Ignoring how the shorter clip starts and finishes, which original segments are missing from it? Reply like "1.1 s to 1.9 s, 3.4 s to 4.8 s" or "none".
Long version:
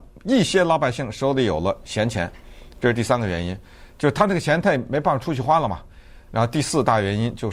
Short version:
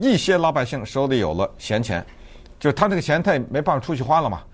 2.8 s to 3.9 s